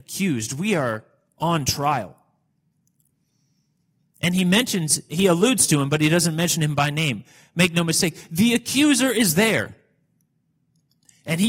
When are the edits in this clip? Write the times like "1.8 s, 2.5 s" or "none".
5.1 s